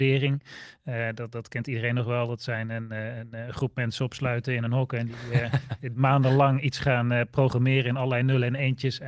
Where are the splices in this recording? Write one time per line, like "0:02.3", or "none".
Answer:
none

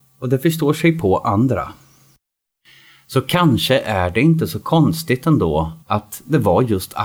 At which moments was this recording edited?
0:05.8

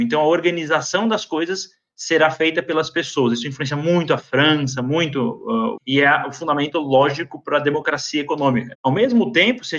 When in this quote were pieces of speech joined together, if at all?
0:05.8
0:08.7

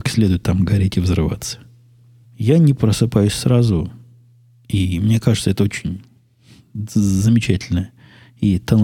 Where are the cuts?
0:02.2

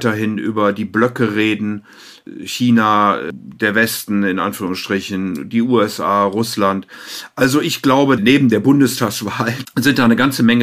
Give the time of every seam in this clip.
0:08.2
0:09.6

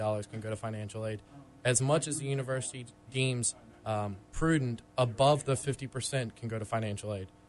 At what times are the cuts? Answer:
0:04.2

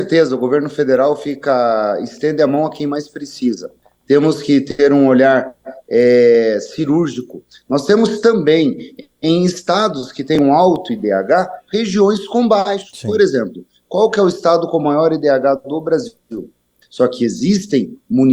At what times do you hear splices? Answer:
0:16.8

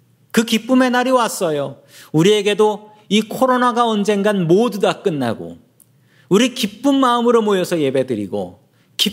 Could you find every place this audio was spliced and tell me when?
none

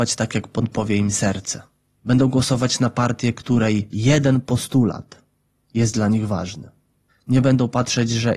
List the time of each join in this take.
none

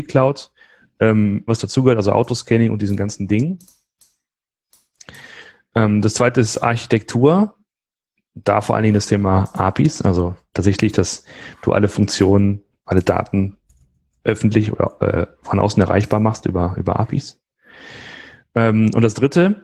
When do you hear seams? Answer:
0:01.5

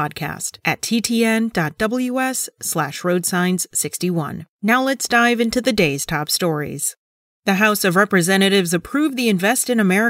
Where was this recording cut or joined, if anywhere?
0:04.5

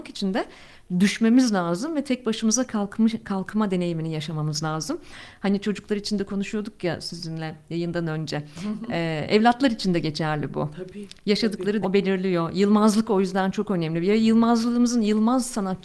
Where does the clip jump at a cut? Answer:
0:11.8

